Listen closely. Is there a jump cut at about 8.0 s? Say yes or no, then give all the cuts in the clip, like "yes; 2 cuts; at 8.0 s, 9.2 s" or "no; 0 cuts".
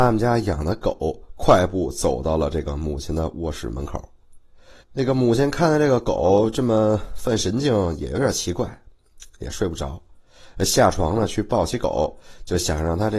no; 1 cut; at 4.8 s